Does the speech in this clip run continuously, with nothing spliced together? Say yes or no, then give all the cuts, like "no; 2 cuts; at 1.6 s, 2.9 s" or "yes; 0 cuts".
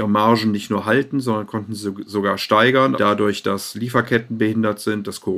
no; 1 cut; at 3.0 s